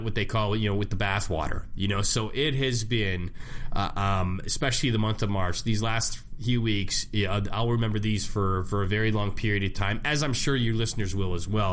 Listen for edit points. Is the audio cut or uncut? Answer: uncut